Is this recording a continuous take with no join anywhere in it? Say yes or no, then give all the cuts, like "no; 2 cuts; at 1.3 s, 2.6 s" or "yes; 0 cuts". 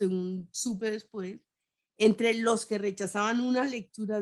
yes; 0 cuts